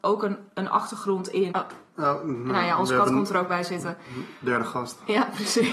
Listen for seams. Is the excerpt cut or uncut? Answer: cut